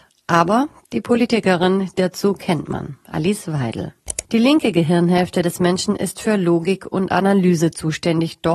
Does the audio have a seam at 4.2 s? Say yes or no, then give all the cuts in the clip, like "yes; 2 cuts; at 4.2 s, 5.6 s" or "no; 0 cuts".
yes; 1 cut; at 4.2 s